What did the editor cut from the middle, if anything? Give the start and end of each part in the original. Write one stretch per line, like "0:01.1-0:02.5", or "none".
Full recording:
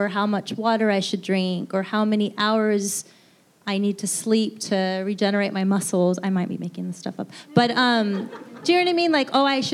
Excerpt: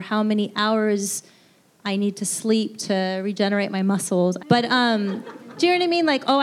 0:06.2-0:07.5